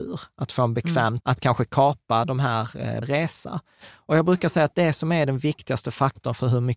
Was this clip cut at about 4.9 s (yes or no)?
no